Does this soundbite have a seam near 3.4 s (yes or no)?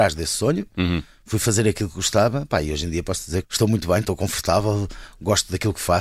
yes